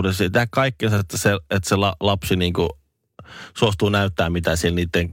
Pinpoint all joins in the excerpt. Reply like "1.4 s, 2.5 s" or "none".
none